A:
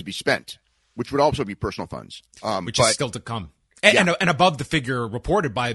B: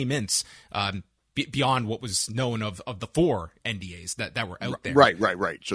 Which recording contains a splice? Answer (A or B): A